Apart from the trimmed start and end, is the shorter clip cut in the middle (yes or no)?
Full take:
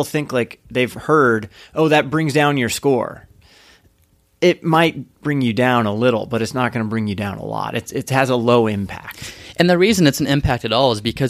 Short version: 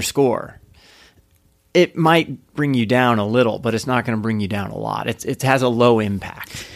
no